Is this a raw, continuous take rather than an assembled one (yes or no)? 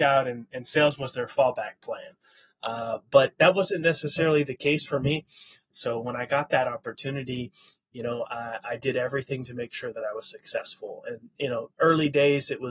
no